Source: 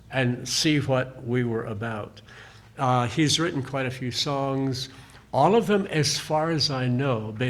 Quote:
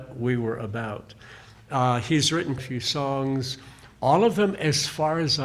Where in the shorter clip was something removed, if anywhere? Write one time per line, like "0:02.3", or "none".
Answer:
0:02.6